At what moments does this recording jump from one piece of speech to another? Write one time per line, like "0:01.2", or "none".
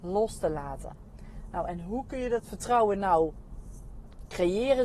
none